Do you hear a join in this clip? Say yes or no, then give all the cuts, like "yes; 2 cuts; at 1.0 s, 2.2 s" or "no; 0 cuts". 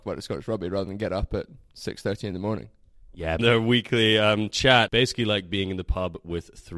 yes; 2 cuts; at 3.4 s, 4.9 s